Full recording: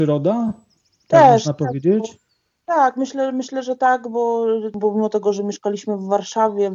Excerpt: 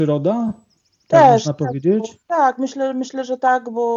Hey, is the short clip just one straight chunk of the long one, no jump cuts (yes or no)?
no